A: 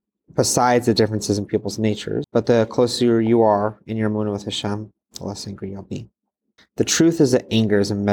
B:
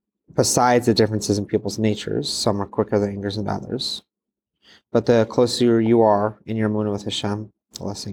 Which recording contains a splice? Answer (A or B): A